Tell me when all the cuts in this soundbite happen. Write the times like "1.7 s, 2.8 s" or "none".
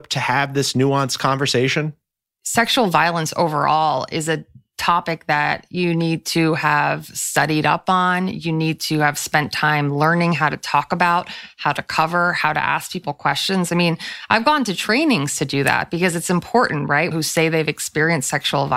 17.1 s